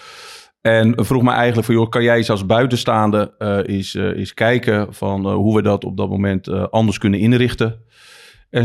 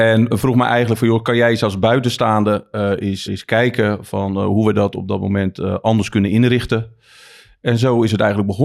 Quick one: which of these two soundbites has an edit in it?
second; 1 cut; at 3.3 s

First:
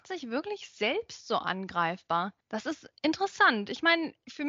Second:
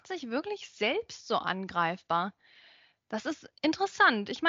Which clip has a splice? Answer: first; 1 cut; at 2.4 s

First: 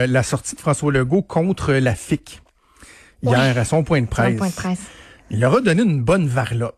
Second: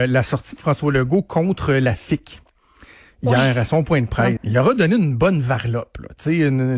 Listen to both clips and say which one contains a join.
second; 1 cut; at 4.4 s

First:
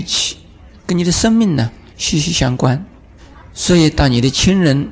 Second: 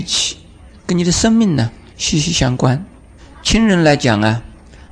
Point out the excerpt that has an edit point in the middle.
second; 1 cut; at 3.4 s

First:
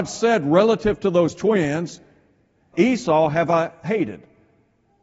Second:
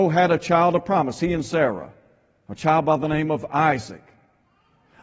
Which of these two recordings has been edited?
first; 1 cut; at 2.7 s

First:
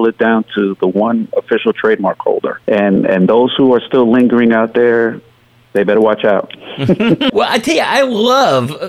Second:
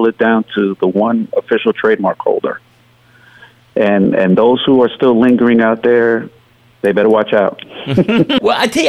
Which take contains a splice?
first; 1 cut; at 2.6 s

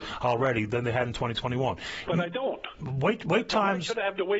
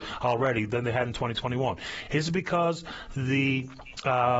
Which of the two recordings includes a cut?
first; 1 cut; at 2.0 s

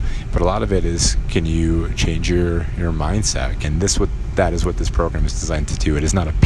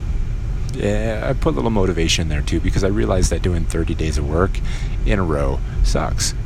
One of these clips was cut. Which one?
first; 1 cut; at 3.6 s

